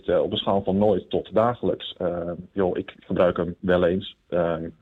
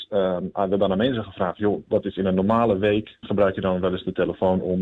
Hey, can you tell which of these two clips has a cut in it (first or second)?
second